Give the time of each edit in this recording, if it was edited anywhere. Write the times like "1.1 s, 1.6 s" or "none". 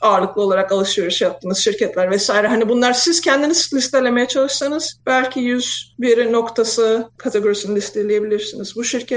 none